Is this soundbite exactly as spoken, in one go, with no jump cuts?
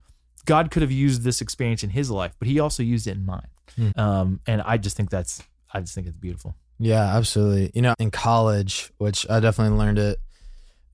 no; 2 cuts; at 3.9 s, 7.9 s

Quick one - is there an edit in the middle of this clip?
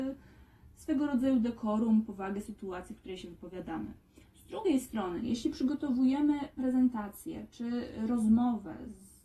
no; 0 cuts

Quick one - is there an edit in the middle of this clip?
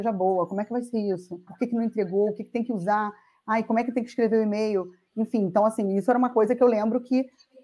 yes; 1 cut; at 1.5 s

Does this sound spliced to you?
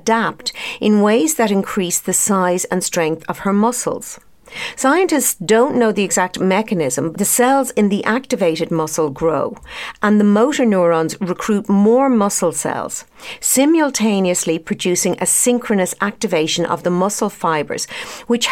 yes; 1 cut; at 7.1 s

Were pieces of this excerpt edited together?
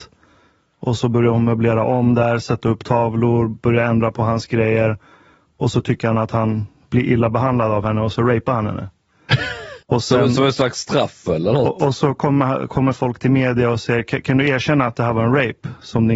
yes; 1 cut; at 9.8 s

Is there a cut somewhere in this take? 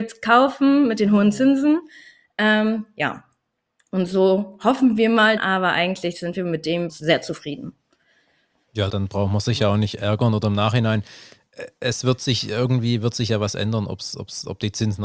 yes; 3 cuts; at 5.4 s, 6.9 s, 8.9 s

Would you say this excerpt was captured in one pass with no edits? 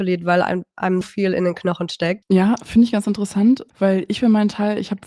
no; 3 cuts; at 1.0 s, 2.2 s, 3.7 s

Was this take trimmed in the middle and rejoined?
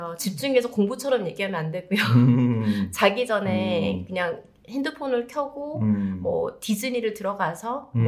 no; 0 cuts

